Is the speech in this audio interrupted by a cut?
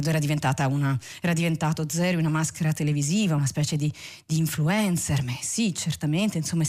no; 0 cuts

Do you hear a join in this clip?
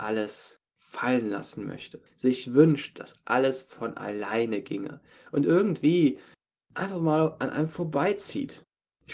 yes; 1 cut; at 2.1 s

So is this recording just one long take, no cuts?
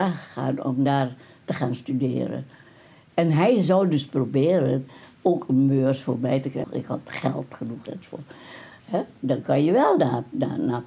no; 2 cuts; at 6.6 s, 8.8 s

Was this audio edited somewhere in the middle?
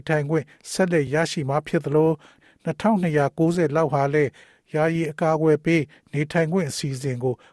no; 0 cuts

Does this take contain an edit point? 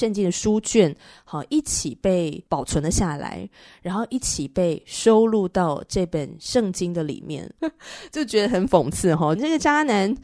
yes; 2 cuts; at 7.6 s, 9.4 s

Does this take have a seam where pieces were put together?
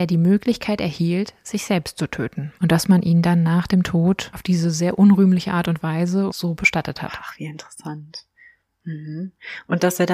yes; 2 cuts; at 2.6 s, 6.3 s

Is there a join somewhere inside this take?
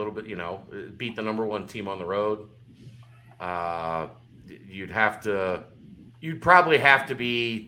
yes; 1 cut; at 6.1 s

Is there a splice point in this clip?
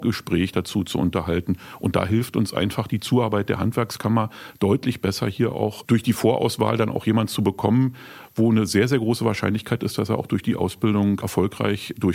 no; 0 cuts

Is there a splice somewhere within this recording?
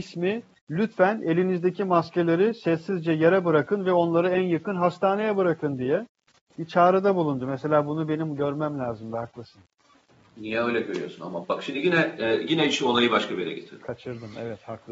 no; 0 cuts

